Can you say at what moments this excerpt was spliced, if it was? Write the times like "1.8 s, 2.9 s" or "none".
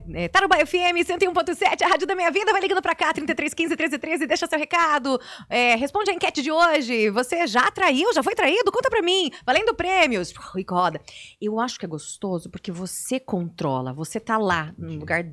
none